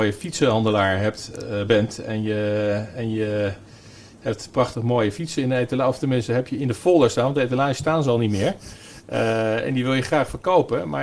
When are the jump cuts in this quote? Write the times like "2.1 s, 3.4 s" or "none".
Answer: none